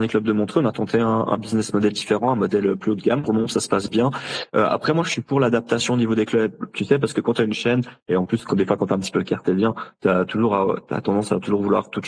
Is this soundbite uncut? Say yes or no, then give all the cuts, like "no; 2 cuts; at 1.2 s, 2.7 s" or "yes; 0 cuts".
yes; 0 cuts